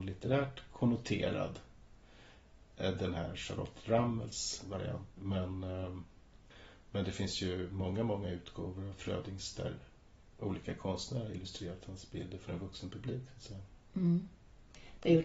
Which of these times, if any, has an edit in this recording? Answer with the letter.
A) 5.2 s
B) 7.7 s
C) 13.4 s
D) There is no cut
A